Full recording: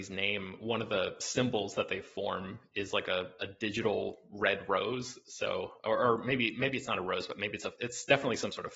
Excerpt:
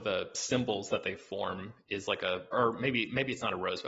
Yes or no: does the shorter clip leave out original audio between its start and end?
yes